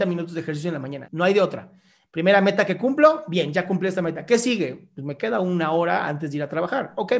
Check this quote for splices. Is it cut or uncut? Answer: cut